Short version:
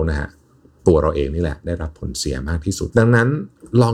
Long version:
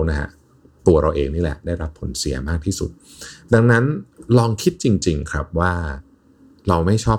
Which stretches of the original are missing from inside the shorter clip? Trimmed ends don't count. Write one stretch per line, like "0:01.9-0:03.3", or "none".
0:02.9-0:03.5